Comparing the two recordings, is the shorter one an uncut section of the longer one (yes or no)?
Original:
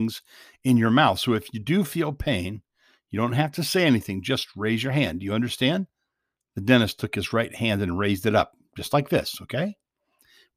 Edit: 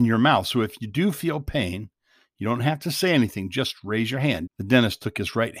no